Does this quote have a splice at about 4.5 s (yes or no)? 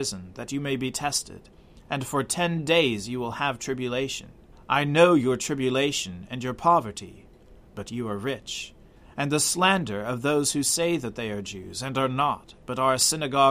yes